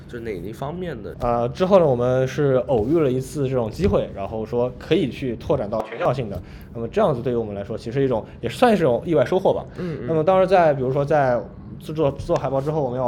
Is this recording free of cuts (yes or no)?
no